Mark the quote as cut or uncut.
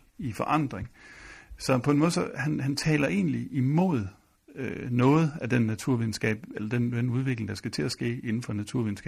uncut